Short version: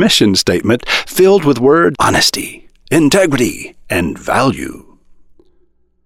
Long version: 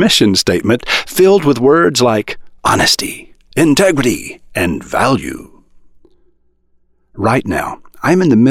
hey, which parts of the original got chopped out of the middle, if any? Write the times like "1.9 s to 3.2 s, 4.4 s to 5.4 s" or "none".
1.9 s to 2.6 s

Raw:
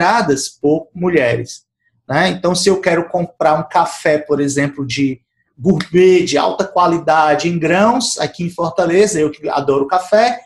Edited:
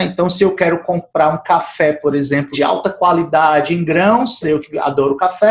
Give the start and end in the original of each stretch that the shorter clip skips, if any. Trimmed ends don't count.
4.8 s to 6.3 s, 8.2 s to 9.1 s

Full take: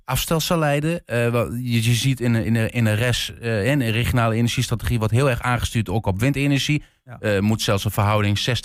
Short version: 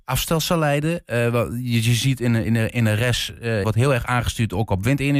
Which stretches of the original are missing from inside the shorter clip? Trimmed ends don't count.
3.6 s to 5.0 s

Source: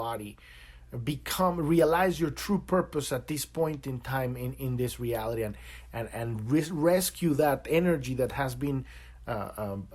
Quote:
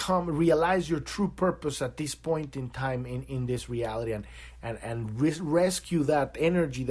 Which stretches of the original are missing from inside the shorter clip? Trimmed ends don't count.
none

